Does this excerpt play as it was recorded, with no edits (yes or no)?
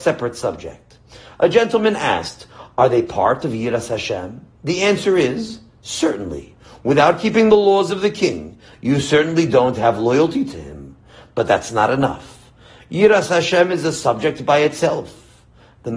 yes